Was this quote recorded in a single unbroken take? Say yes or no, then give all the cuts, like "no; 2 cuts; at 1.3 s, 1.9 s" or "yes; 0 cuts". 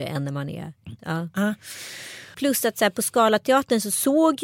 no; 2 cuts; at 1.0 s, 2.3 s